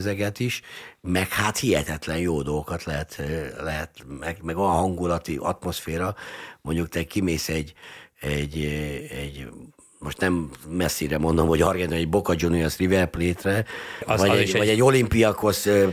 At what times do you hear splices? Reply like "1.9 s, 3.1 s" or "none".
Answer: 14.0 s